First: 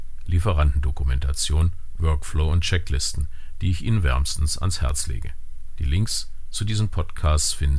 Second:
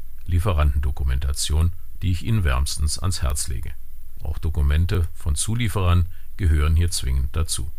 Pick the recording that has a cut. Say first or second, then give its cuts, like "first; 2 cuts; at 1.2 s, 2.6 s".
second; 2 cuts; at 2.0 s, 4.2 s